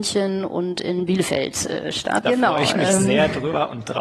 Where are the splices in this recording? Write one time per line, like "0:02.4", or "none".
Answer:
0:02.2